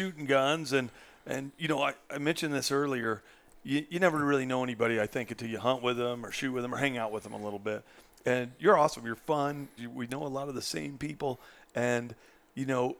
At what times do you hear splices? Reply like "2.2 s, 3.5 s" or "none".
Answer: 9.8 s